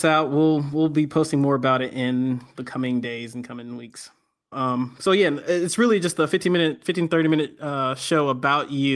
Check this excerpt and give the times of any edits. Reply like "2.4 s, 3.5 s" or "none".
4.5 s